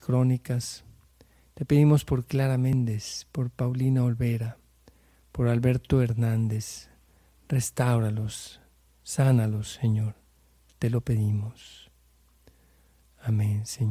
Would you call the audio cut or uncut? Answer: uncut